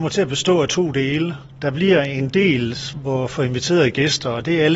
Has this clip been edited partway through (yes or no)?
no